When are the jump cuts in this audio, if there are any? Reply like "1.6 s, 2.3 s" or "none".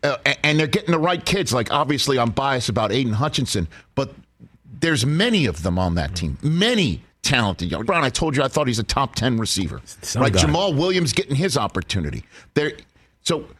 7.9 s